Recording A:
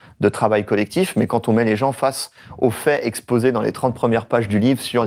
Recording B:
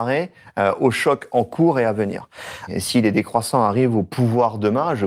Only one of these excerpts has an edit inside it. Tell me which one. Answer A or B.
B